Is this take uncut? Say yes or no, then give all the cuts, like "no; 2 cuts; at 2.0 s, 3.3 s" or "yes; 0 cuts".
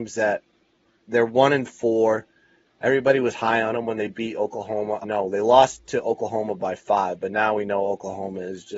no; 1 cut; at 5.0 s